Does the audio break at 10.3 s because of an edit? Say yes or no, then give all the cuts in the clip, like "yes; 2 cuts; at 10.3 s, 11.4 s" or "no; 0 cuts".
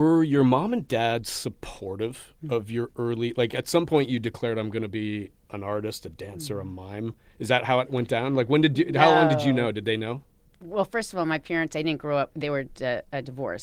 no; 0 cuts